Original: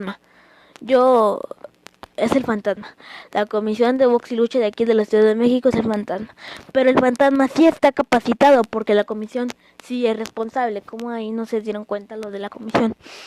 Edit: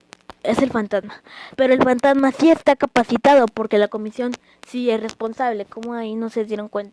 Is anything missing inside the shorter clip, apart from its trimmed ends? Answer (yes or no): yes